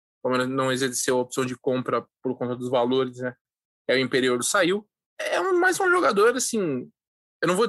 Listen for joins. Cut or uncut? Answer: cut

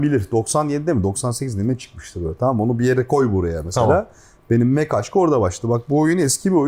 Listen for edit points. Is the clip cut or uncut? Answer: uncut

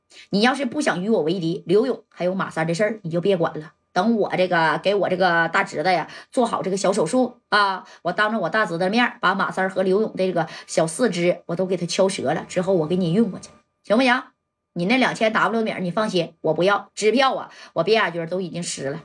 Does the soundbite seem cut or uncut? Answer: uncut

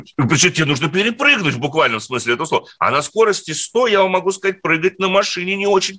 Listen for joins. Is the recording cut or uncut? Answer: uncut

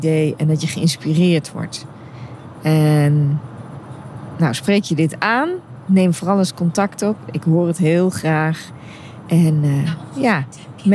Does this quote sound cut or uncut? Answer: uncut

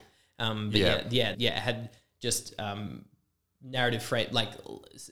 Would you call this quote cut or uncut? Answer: cut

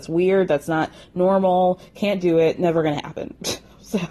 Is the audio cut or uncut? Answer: uncut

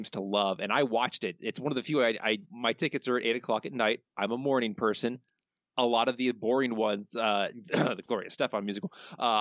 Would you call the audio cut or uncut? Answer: cut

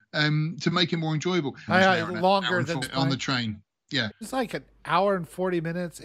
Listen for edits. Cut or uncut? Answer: cut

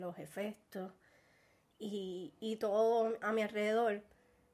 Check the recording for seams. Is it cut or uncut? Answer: uncut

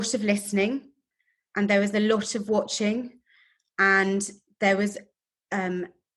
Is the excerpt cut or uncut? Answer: uncut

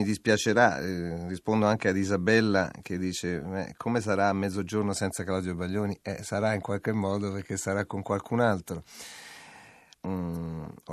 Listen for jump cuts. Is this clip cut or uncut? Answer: cut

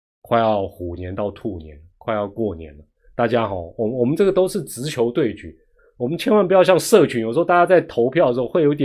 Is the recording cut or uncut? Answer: uncut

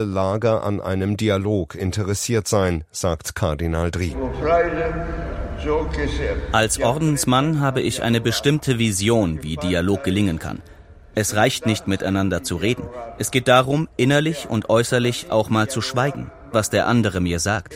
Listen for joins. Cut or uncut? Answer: cut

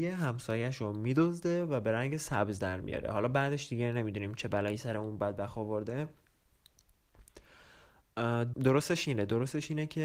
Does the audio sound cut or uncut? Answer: cut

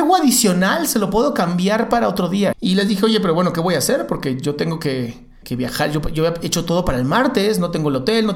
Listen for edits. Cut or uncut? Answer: cut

